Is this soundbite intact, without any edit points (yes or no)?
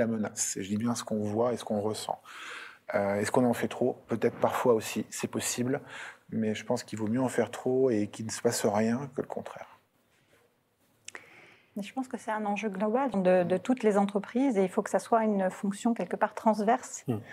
no